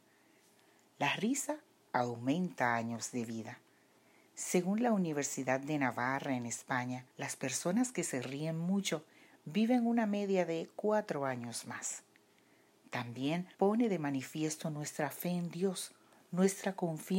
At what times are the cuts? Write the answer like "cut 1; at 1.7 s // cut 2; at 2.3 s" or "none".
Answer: cut 1; at 7.1 s // cut 2; at 13.5 s